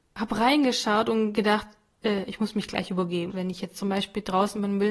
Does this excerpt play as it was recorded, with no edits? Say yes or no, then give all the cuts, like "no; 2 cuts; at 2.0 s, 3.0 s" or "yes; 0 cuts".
no; 1 cut; at 3.3 s